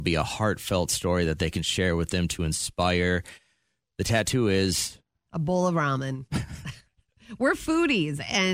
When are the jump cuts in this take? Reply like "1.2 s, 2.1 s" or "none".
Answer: none